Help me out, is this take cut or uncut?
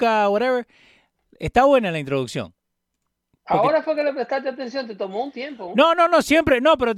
uncut